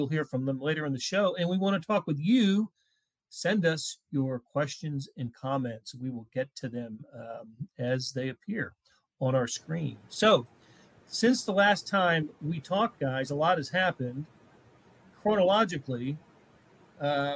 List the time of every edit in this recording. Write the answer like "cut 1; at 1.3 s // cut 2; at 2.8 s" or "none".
cut 1; at 11.0 s